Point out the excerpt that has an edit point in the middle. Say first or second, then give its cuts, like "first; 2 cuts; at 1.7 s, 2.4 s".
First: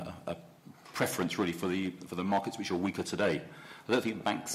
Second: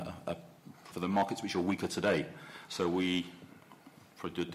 second; 2 cuts; at 0.9 s, 2.7 s